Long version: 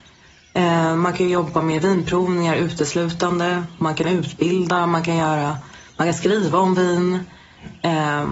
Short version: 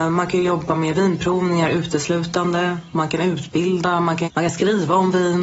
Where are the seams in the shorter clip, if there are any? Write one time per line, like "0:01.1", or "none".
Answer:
0:04.2